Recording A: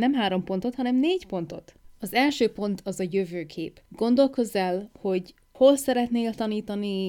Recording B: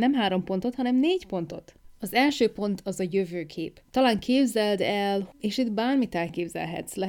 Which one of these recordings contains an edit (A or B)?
B